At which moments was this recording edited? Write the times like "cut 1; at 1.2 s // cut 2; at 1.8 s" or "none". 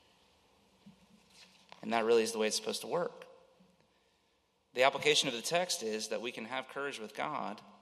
none